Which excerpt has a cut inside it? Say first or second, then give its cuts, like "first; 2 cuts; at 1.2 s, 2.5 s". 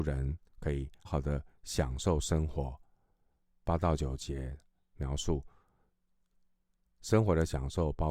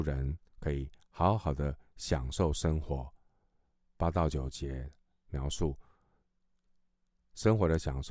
first; 1 cut; at 1.0 s